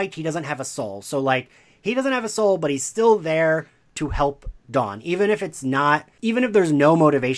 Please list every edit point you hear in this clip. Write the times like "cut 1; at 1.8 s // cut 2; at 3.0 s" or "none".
none